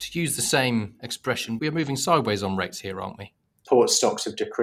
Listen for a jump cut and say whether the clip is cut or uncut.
cut